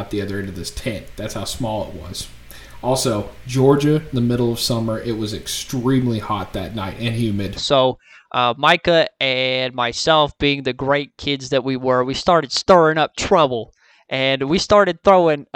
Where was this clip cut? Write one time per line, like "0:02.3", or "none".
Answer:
0:07.6